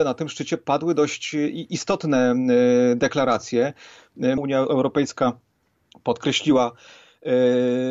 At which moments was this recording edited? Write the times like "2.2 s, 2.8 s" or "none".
4.4 s